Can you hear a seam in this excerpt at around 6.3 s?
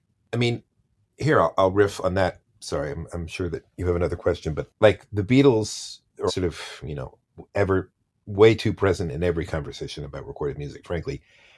yes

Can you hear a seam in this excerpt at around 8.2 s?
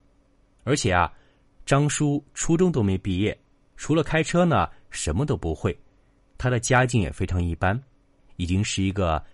yes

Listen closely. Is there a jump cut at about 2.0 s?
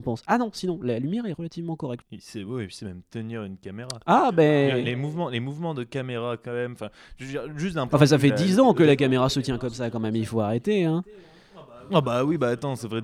yes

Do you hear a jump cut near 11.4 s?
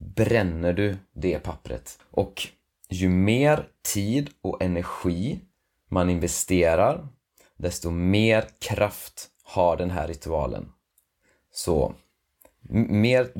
no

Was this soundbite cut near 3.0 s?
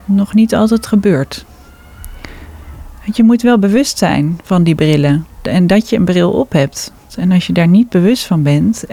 no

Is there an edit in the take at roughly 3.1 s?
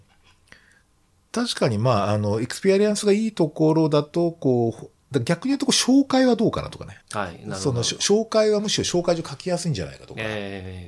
no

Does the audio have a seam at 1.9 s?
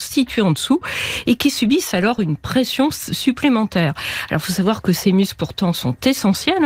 no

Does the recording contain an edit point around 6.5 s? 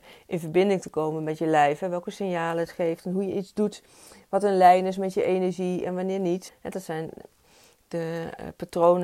yes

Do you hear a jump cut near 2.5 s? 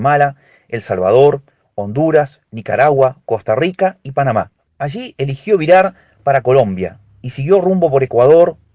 no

